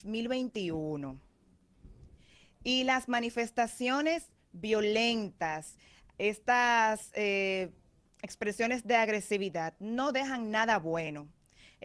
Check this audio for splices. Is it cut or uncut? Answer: uncut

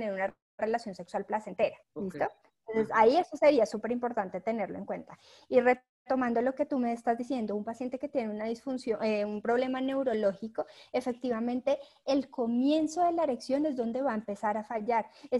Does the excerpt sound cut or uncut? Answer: cut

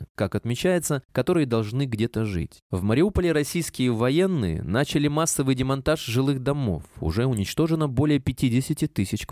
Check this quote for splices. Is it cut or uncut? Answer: cut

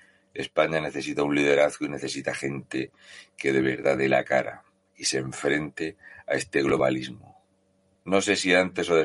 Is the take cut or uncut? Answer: cut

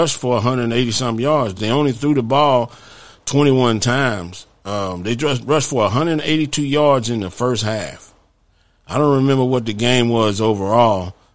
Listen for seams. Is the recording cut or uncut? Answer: uncut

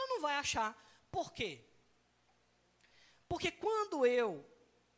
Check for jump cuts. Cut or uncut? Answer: uncut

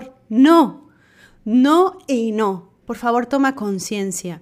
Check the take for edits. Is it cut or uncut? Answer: cut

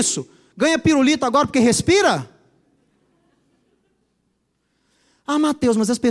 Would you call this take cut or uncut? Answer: uncut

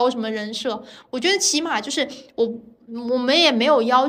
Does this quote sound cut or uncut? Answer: uncut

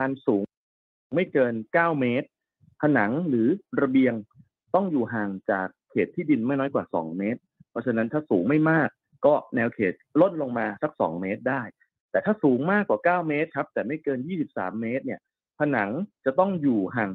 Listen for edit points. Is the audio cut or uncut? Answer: uncut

